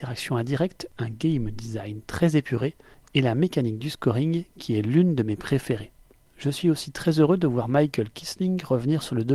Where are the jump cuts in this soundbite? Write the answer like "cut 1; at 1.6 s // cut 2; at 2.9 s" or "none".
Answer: cut 1; at 0.9 s